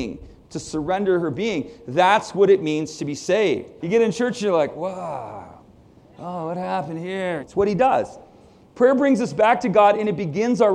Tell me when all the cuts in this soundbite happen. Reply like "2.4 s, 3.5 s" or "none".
3.8 s, 7.4 s